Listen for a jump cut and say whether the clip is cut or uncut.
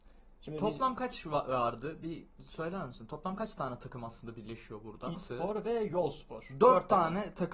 cut